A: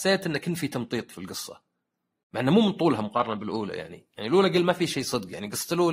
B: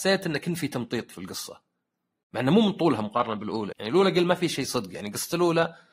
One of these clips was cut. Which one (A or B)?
B